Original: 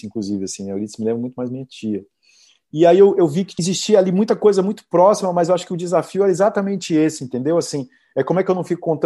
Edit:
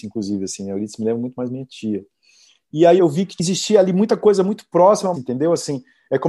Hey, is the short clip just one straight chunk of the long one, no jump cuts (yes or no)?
no